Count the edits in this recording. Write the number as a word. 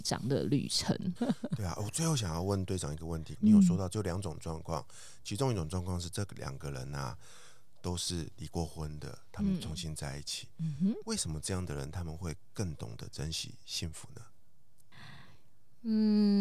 two